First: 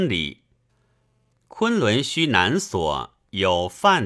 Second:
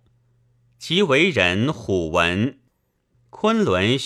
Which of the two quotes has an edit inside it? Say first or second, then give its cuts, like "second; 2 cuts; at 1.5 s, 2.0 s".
second; 1 cut; at 3.1 s